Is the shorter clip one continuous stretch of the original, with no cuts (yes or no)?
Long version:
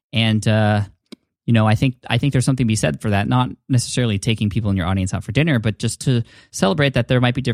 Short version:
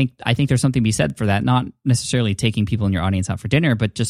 yes